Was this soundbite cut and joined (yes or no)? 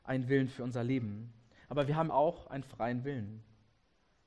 yes